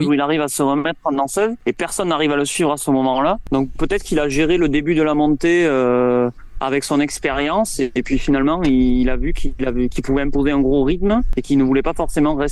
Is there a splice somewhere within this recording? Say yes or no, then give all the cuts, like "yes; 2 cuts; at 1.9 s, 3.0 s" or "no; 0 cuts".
no; 0 cuts